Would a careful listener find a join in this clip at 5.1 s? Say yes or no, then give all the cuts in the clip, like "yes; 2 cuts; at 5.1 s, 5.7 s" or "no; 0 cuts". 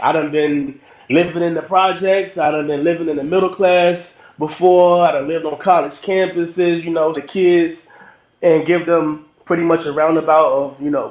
no; 1 cut; at 7.1 s